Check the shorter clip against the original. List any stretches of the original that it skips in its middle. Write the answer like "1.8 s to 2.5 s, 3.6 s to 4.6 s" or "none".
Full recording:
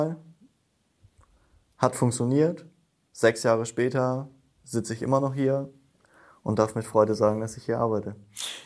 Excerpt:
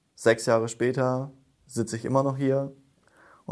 none